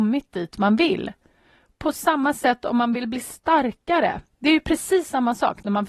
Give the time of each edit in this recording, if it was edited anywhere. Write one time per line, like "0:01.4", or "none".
none